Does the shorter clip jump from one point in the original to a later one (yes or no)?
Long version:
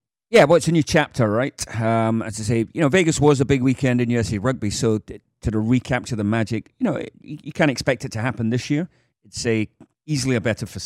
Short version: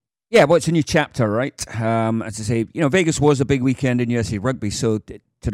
no